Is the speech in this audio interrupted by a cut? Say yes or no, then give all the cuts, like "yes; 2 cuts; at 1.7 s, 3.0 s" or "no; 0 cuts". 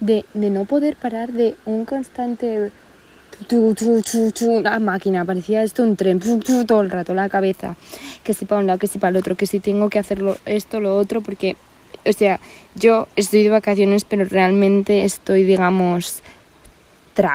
no; 0 cuts